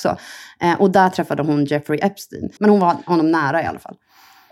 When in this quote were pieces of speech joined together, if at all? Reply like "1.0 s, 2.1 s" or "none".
2.6 s